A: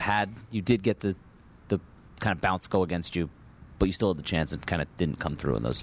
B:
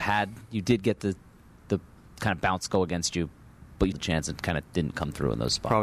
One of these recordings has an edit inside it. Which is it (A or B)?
B